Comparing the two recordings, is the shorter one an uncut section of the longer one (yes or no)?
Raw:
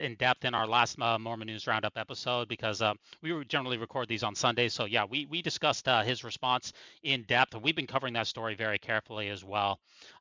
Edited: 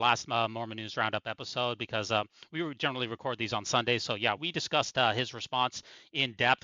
no